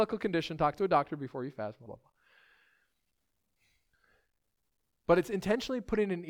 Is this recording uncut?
no; 1 cut; at 1.9 s

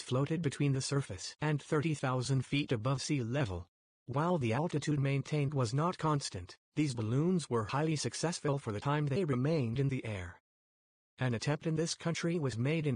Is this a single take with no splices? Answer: no; 1 cut; at 3.9 s

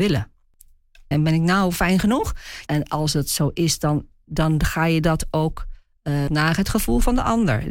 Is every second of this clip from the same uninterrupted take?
no; 3 cuts; at 1.1 s, 2.7 s, 6.3 s

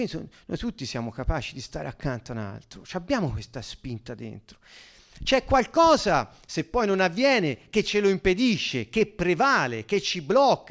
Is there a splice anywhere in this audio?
no; 0 cuts

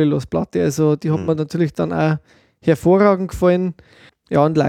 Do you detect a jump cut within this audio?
no; 0 cuts

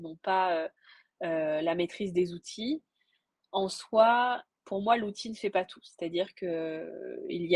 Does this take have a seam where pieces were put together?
no; 0 cuts

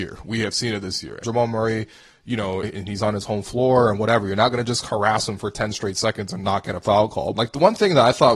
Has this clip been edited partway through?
yes; 3 cuts; at 1.2 s, 2.6 s, 7.3 s

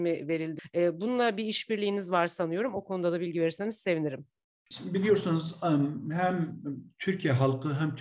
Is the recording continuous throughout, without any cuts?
yes; 0 cuts

